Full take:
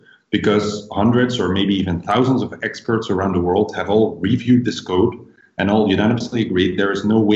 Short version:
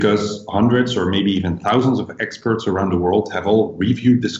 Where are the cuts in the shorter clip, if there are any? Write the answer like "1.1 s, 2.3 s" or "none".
none